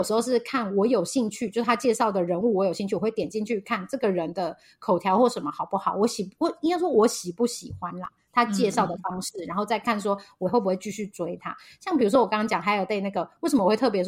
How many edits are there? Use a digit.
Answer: 0